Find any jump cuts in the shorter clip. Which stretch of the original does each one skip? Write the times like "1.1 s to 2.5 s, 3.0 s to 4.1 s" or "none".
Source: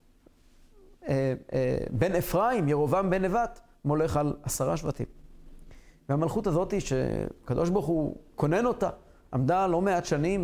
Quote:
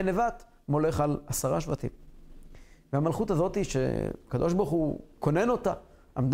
none